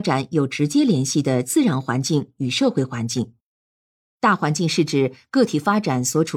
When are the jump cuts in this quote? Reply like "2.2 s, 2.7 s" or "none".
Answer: 4.0 s